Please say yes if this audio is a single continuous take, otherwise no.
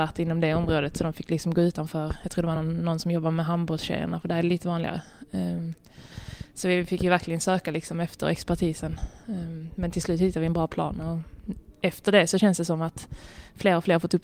yes